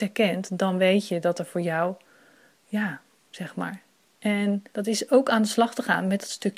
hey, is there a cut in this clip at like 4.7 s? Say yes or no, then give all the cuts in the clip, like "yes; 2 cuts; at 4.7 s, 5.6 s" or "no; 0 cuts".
yes; 2 cuts; at 3.2 s, 4.7 s